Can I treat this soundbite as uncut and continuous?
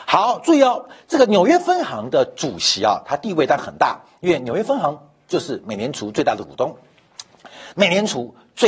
no; 1 cut; at 7.7 s

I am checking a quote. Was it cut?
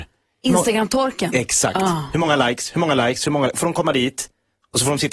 no; 0 cuts

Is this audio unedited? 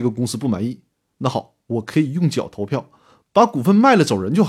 yes; 0 cuts

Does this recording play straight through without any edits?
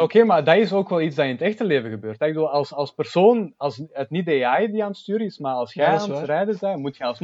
yes; 0 cuts

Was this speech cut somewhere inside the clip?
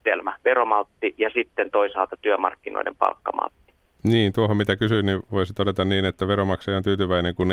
no; 0 cuts

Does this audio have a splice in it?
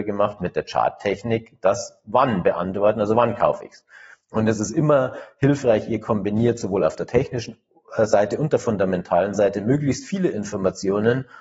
yes; 1 cut; at 4.2 s

